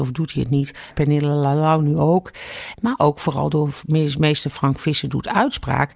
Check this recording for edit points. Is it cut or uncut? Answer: cut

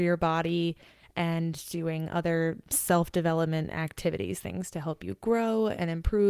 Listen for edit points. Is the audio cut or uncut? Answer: uncut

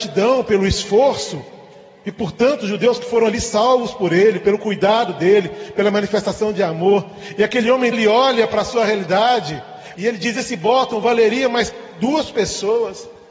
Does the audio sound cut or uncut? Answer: cut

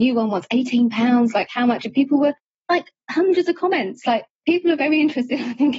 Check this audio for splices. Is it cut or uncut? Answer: uncut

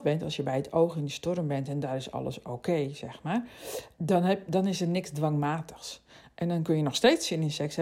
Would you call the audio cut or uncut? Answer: cut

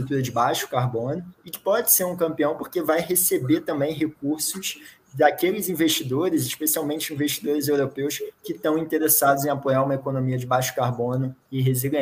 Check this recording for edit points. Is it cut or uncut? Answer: uncut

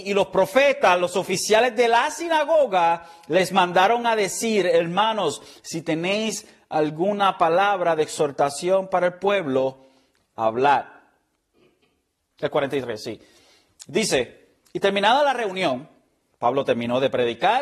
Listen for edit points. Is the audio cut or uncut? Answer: cut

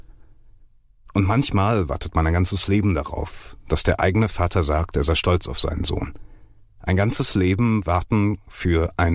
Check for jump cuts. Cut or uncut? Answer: uncut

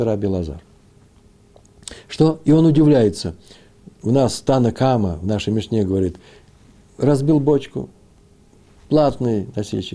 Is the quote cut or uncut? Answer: uncut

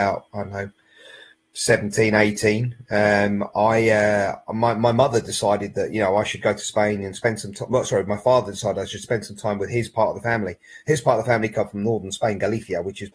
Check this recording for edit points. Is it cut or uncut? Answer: uncut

